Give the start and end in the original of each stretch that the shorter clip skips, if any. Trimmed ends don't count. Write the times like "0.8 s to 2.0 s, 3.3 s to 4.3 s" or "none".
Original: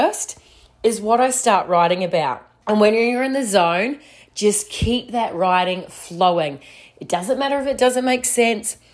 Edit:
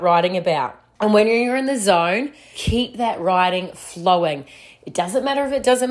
4.2 s to 4.7 s